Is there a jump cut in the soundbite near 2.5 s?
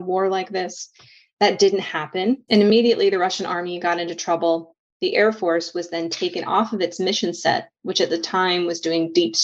yes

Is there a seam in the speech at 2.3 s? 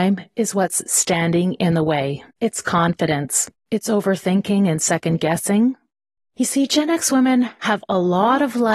yes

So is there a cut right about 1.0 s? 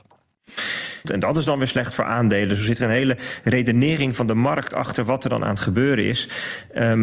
yes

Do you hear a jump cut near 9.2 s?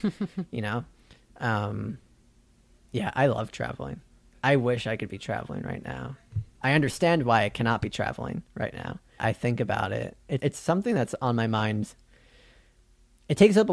yes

